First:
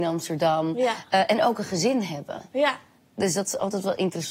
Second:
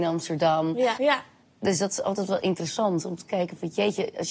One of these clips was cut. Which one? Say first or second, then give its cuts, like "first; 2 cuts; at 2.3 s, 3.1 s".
second; 1 cut; at 0.9 s